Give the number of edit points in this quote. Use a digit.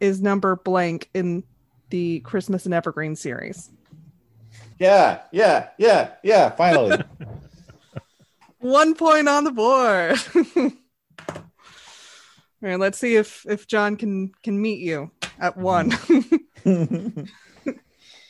1